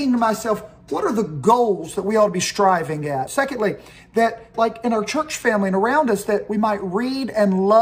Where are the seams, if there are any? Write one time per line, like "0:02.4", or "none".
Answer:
0:03.3
0:04.5